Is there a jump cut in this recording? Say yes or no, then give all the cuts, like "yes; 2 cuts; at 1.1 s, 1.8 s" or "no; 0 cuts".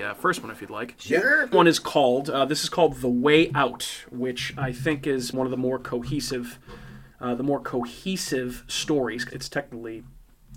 yes; 3 cuts; at 1.5 s, 5.3 s, 9.3 s